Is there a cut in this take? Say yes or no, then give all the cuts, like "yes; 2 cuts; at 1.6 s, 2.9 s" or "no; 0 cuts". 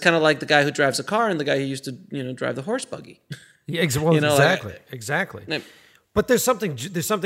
no; 0 cuts